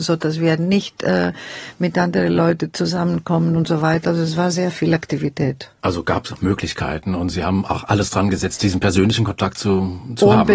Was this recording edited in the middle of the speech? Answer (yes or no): no